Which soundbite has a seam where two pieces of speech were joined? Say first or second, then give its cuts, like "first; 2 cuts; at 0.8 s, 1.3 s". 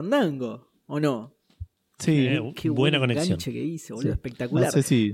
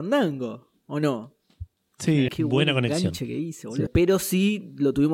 second; 2 cuts; at 2.3 s, 3.9 s